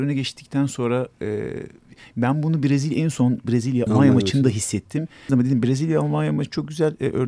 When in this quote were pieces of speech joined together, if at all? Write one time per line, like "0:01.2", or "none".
0:03.9
0:05.3